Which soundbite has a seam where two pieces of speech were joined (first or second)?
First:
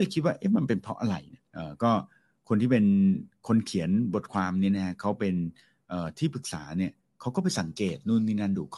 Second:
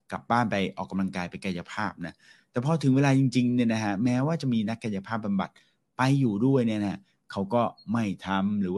first